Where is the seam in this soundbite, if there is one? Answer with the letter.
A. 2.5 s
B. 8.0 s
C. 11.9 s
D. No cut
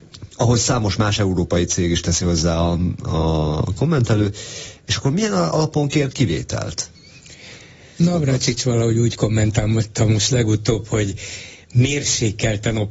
B